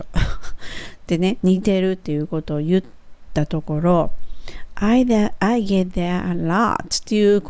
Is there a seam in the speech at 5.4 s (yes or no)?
no